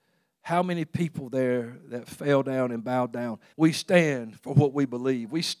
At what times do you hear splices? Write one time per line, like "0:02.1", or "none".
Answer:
0:03.5